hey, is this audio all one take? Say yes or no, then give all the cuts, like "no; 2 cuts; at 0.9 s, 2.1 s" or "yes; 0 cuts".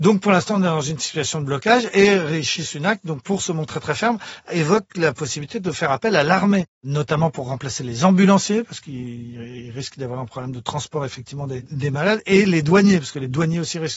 yes; 0 cuts